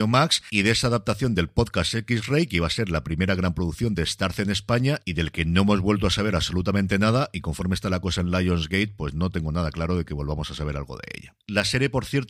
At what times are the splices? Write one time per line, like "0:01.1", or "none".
none